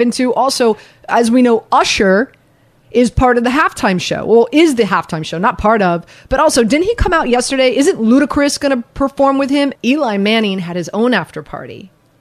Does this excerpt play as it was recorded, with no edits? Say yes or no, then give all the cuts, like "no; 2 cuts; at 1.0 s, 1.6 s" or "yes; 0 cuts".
no; 1 cut; at 9.8 s